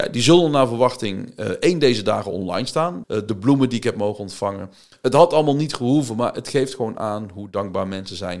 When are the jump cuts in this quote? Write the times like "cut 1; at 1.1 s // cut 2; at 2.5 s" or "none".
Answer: cut 1; at 3.0 s